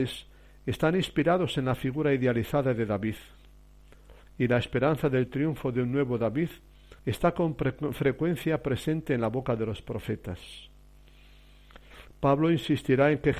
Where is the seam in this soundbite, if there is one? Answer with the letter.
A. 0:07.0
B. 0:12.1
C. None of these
A